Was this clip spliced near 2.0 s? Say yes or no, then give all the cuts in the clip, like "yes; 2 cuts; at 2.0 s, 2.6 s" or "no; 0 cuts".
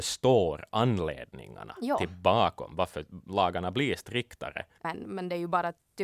no; 1 cut; at 4.8 s